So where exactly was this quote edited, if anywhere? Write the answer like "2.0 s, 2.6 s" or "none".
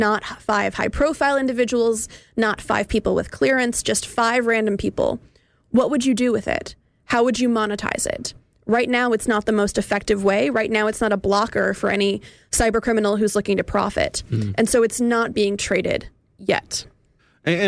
none